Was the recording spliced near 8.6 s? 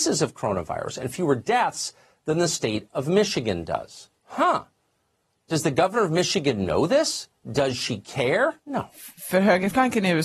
yes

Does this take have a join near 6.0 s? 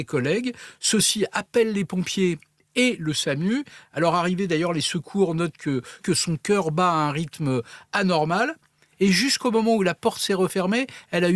yes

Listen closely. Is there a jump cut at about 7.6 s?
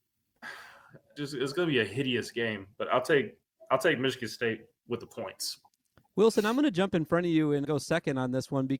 yes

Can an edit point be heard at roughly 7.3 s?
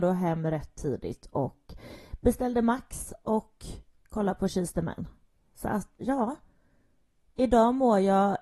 no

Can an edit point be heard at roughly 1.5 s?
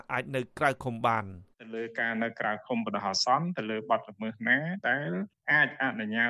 yes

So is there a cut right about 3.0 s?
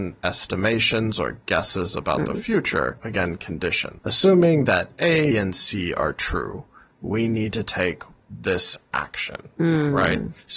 yes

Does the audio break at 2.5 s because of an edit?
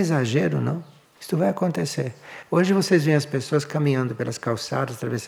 no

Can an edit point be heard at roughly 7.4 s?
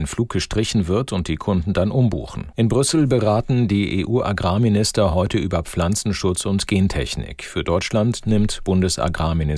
no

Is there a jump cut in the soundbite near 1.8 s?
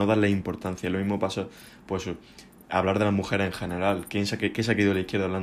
no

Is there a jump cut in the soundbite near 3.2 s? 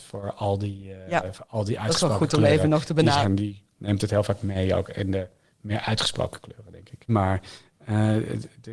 yes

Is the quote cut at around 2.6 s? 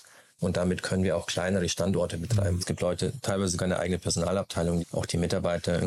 yes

